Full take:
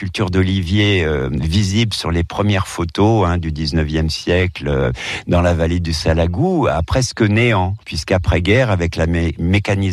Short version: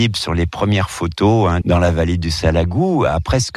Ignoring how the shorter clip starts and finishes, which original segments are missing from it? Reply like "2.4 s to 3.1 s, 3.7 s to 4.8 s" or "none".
3.4 s to 5.2 s